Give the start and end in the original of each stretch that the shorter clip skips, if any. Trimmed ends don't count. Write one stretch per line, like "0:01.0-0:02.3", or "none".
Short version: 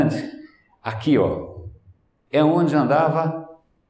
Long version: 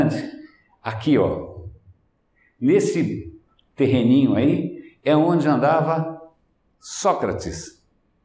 0:02.3-0:05.0